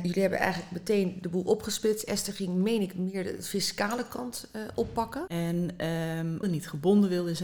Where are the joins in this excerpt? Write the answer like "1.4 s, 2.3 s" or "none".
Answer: 5.3 s, 6.4 s